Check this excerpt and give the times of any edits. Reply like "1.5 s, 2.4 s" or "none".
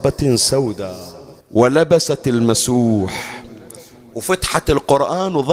1.4 s